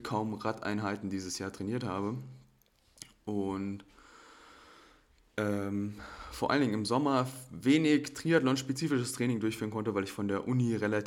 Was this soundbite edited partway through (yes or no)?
no